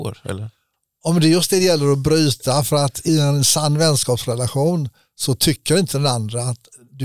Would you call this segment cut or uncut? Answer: cut